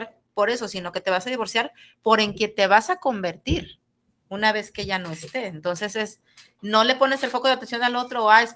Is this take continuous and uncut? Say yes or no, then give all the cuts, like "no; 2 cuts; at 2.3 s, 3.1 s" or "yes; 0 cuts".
yes; 0 cuts